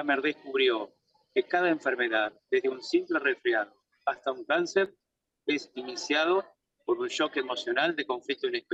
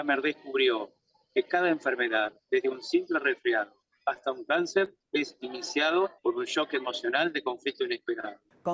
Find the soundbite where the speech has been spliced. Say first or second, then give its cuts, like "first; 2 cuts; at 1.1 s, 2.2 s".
second; 2 cuts; at 5.0 s, 6.2 s